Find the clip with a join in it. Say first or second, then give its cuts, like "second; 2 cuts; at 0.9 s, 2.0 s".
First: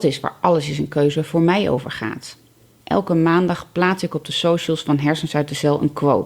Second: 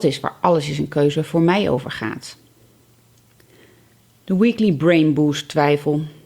first; 1 cut; at 2.8 s